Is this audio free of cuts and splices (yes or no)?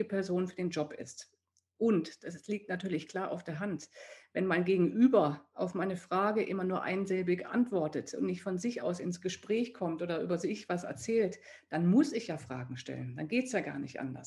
yes